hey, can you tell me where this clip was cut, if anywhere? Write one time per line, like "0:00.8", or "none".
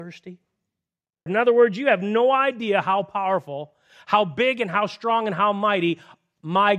0:01.3